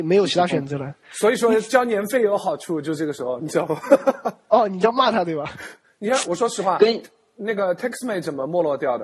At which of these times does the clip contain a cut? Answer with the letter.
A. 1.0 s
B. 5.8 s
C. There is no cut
B